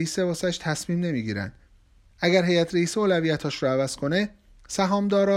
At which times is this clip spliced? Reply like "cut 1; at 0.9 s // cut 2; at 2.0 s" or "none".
cut 1; at 2.1 s